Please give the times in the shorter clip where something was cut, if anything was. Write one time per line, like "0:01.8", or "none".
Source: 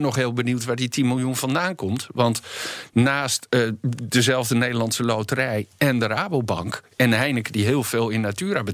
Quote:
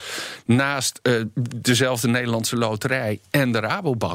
none